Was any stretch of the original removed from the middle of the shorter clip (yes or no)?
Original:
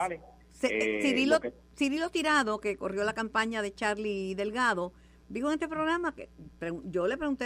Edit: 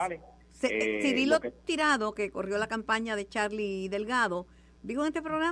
yes